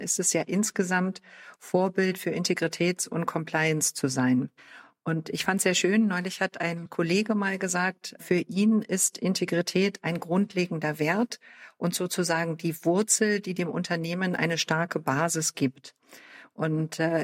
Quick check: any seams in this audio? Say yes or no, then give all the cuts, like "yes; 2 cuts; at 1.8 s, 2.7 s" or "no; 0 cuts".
no; 0 cuts